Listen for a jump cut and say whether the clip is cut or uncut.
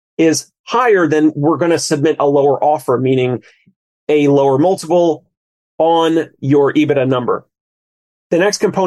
uncut